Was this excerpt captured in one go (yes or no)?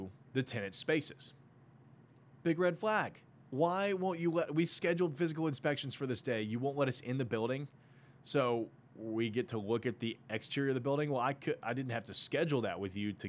yes